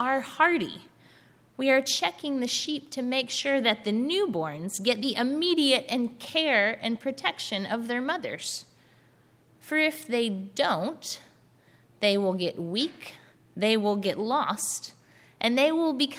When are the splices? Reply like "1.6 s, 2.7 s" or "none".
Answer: none

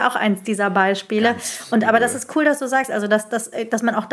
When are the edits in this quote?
none

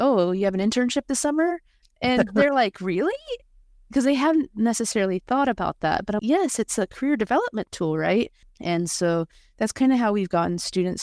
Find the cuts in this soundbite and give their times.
1.8 s, 6.2 s, 8.4 s

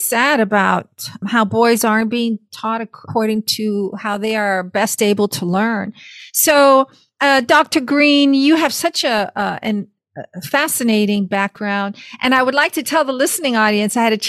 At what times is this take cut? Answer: none

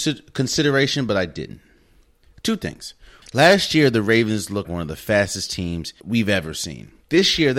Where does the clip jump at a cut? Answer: 3.2 s, 4.6 s, 6.0 s

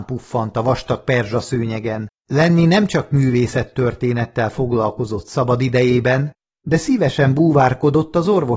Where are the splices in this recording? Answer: 2.2 s

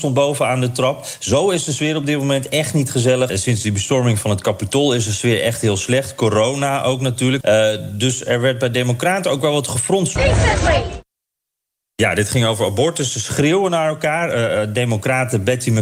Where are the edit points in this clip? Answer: 3.3 s, 7.4 s, 10.2 s

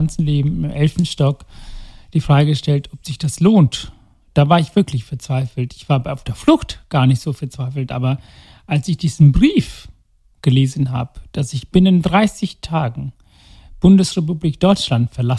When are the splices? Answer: none

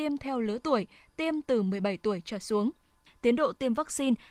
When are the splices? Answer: 3.1 s

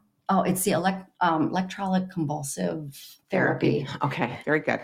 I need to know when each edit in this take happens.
3.2 s

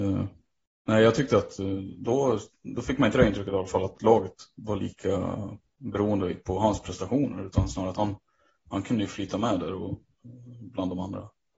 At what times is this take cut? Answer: none

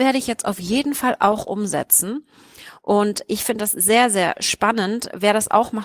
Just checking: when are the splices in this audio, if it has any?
none

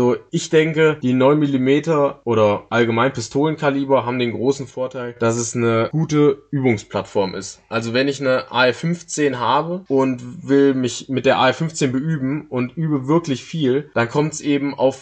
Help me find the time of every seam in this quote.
none

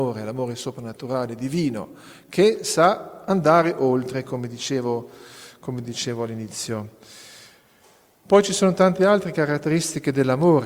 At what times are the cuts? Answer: none

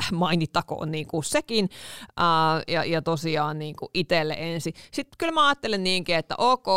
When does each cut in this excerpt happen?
2.7 s

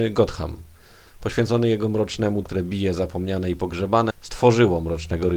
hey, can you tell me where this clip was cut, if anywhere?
2.4 s, 4.1 s

